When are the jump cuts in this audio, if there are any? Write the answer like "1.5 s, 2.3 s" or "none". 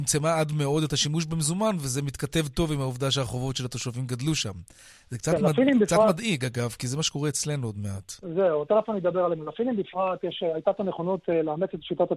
none